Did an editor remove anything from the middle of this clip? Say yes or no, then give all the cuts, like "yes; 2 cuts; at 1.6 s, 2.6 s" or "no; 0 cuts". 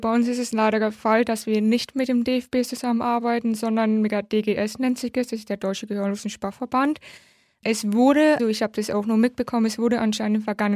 yes; 1 cut; at 8.4 s